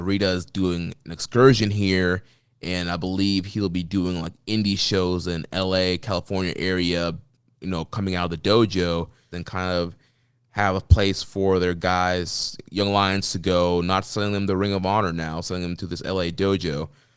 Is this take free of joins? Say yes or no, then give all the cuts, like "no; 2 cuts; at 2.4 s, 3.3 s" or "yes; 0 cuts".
no; 1 cut; at 9.3 s